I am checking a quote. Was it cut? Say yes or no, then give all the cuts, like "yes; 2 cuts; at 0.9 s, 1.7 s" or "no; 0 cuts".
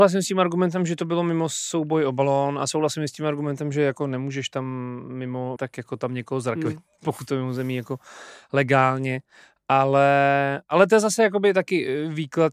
yes; 1 cut; at 5.6 s